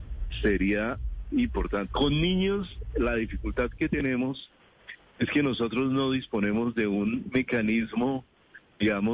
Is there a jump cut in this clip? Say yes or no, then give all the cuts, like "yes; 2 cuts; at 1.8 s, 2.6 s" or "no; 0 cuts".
yes; 1 cut; at 1.9 s